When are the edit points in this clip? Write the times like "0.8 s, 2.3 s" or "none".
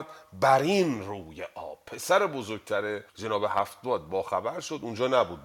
3.1 s